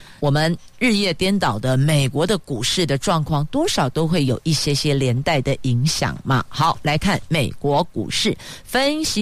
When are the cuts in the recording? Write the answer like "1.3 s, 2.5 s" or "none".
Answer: none